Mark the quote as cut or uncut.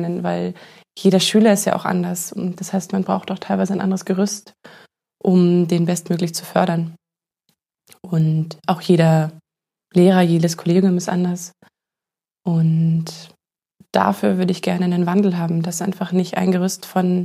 uncut